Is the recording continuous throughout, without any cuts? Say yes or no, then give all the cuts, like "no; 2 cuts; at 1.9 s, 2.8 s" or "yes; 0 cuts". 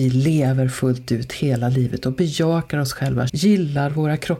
no; 1 cut; at 3.3 s